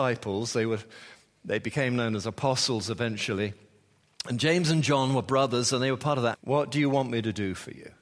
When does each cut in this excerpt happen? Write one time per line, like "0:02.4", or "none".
0:06.3